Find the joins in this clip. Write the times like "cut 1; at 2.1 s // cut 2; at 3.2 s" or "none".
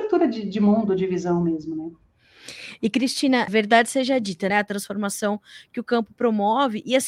cut 1; at 3.5 s // cut 2; at 4.5 s